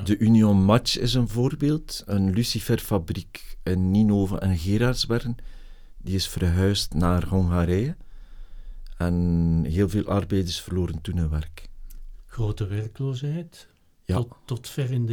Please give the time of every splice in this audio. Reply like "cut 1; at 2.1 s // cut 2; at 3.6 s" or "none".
none